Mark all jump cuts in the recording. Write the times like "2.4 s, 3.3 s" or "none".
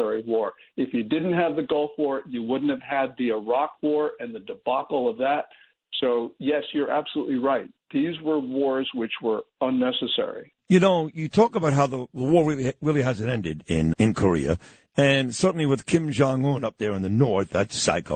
10.6 s, 13.9 s